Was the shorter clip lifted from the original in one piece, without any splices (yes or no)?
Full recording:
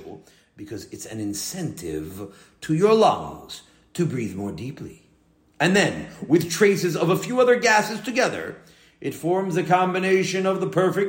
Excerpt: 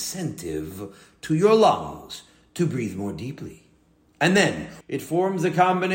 no